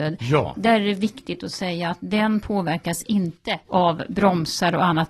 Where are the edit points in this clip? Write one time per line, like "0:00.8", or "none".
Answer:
0:03.6